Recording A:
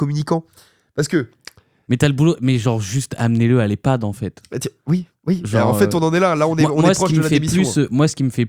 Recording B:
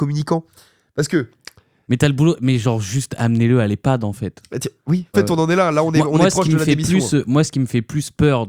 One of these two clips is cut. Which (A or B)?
B